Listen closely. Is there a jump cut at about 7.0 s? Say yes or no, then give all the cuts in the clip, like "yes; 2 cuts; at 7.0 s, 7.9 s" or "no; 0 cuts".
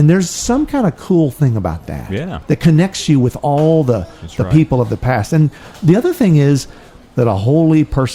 yes; 1 cut; at 7.0 s